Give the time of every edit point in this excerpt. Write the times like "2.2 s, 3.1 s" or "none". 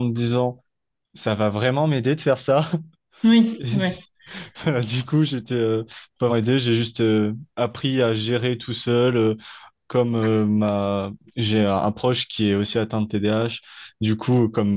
6.3 s

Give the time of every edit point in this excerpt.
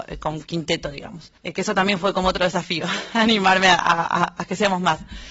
1.4 s

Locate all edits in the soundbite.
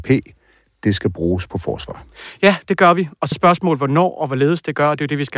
3.3 s

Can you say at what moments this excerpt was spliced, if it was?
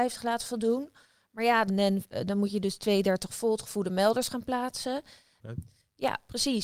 1.7 s, 5.4 s

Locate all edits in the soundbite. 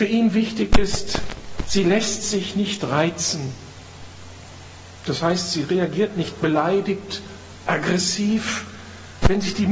7.7 s

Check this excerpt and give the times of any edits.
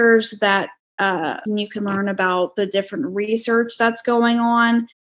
1.5 s

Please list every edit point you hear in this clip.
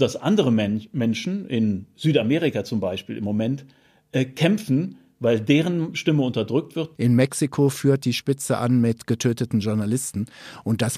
6.9 s

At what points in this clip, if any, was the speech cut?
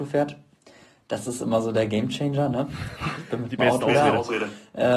none

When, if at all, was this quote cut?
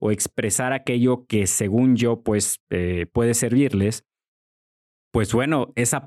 none

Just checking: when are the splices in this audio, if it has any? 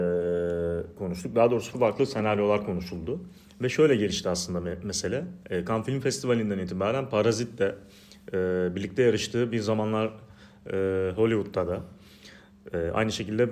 1.7 s

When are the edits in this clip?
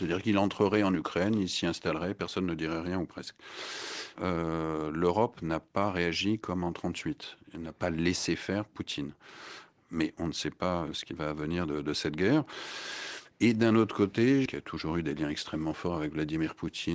4.2 s, 14.5 s

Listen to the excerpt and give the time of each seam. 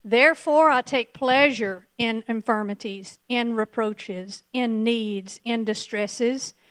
5.4 s

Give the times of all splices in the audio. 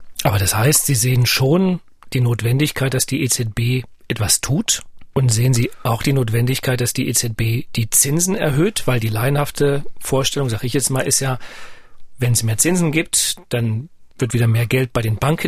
5.1 s, 14.1 s

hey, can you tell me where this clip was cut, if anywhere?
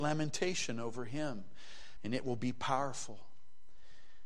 2.0 s

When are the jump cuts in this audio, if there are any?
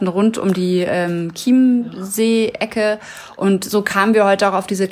none

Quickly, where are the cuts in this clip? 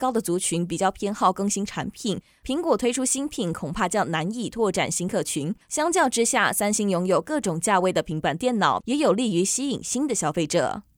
8.8 s

